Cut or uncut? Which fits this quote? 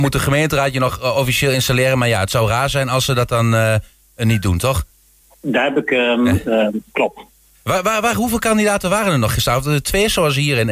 uncut